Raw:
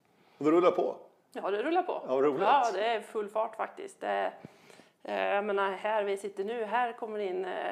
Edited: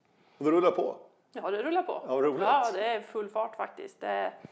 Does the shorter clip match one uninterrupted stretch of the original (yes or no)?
yes